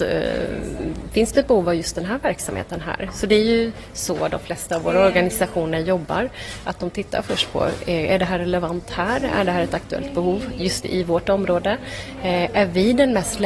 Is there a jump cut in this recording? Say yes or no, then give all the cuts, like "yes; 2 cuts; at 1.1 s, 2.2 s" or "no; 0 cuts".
no; 0 cuts